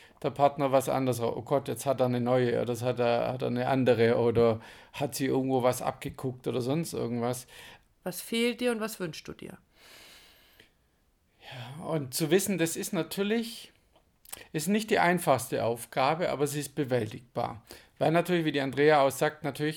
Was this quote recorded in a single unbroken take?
no; 1 cut; at 7.9 s

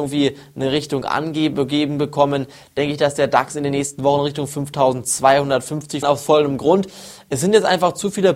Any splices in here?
yes; 1 cut; at 6.0 s

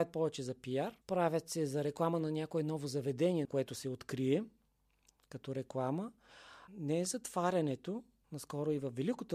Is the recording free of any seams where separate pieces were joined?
no; 3 cuts; at 1.0 s, 3.4 s, 6.7 s

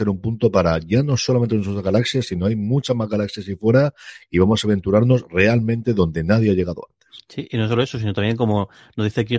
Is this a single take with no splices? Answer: yes; 0 cuts

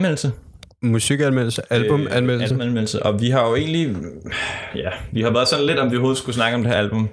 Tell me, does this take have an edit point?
no; 0 cuts

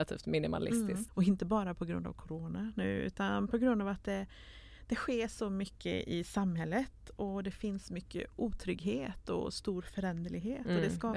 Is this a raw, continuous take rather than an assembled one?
no; 1 cut; at 1.1 s

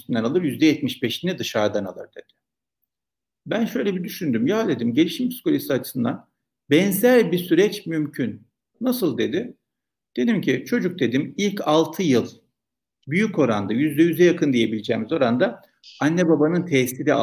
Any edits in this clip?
no; 0 cuts

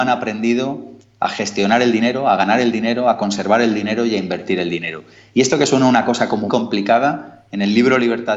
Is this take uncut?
no; 1 cut; at 6.5 s

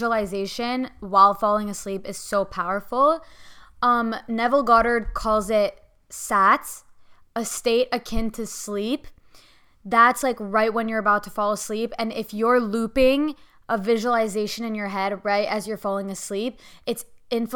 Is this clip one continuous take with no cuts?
yes; 0 cuts

